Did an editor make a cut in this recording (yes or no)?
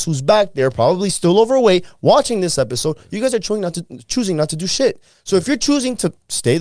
no